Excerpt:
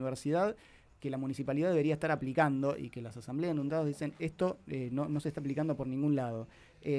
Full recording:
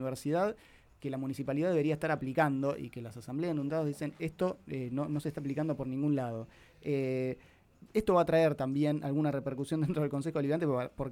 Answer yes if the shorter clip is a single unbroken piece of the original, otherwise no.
yes